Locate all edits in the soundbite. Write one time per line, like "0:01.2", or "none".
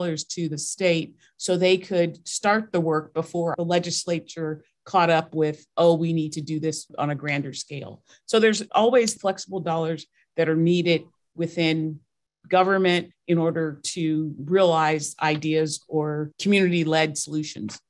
0:13.1